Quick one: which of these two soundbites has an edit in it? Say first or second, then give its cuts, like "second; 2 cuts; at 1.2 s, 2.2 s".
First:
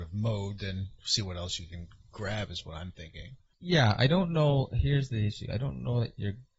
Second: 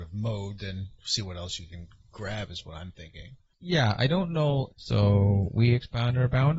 second; 1 cut; at 4.7 s